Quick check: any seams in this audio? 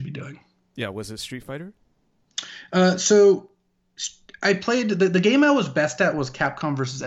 no; 0 cuts

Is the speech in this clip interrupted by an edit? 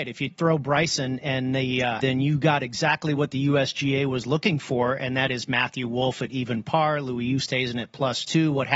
yes; 1 cut; at 2.0 s

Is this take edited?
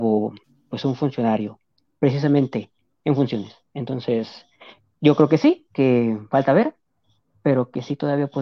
no; 0 cuts

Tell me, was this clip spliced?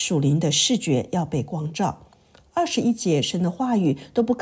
no; 0 cuts

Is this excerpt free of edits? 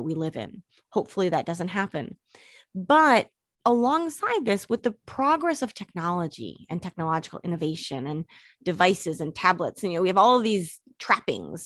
yes; 0 cuts

